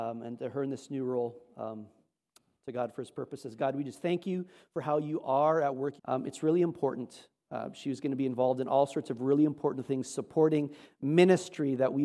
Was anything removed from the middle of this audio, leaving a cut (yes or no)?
yes